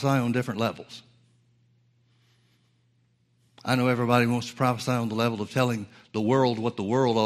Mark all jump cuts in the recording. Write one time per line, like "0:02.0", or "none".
none

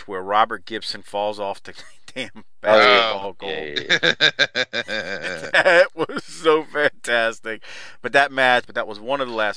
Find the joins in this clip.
0:08.6

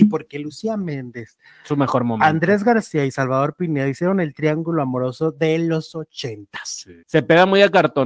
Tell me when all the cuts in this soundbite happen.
0:07.0

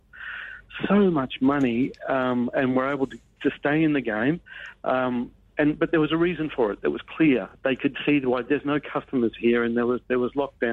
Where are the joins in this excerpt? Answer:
none

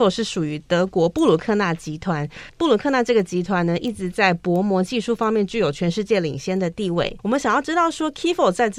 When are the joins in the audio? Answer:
0:07.2

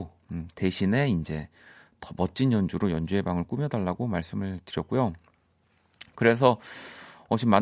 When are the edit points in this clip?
none

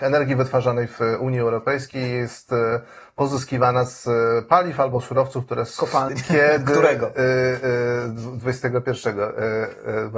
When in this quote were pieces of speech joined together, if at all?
0:06.1

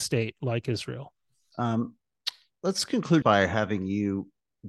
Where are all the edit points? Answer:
0:01.5
0:03.2

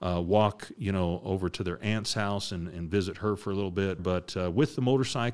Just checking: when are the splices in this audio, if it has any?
0:04.0

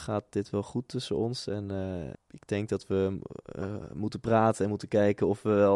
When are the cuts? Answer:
0:02.1

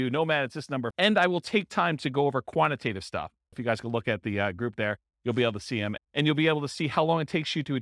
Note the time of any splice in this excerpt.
0:00.9
0:03.5
0:06.0

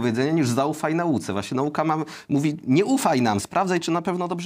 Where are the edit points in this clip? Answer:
0:03.4

